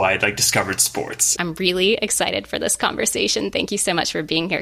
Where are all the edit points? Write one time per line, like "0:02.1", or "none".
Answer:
0:01.4